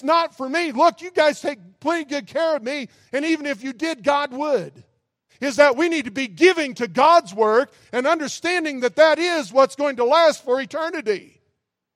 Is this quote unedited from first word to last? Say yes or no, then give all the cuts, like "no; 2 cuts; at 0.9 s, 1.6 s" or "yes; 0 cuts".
no; 1 cut; at 5.3 s